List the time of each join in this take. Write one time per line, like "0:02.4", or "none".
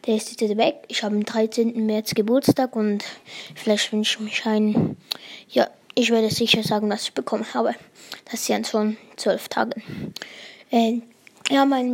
none